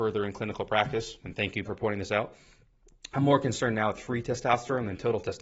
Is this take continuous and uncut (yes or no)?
no